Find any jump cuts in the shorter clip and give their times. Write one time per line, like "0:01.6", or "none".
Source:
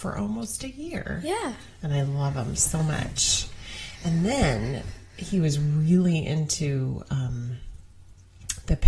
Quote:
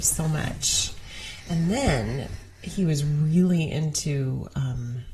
none